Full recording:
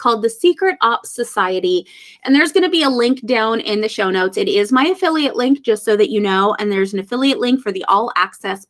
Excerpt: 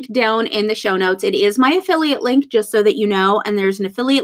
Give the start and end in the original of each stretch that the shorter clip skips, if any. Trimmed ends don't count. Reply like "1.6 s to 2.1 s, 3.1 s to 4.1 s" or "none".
none